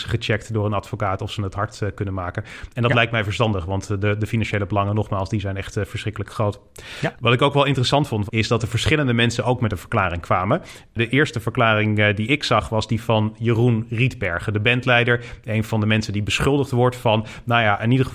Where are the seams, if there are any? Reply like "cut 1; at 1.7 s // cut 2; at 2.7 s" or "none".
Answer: cut 1; at 8.3 s